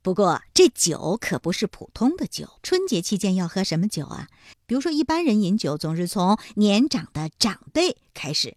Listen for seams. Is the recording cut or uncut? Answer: cut